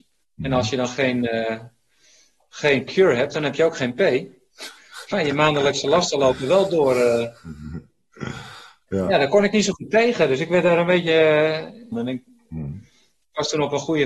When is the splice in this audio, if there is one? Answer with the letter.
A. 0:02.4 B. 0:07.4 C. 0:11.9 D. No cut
C